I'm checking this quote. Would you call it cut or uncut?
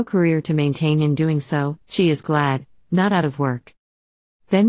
cut